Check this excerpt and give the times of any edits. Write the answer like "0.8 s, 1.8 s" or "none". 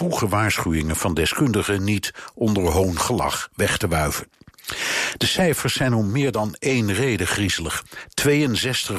none